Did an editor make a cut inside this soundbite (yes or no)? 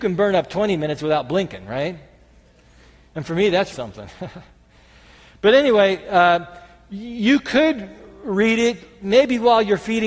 yes